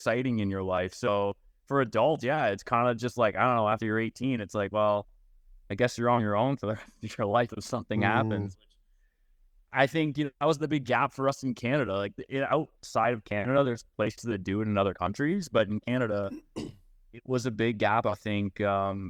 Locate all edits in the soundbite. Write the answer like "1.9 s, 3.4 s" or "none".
none